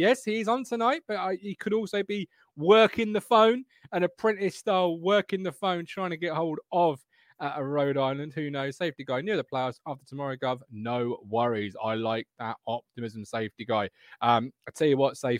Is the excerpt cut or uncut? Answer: uncut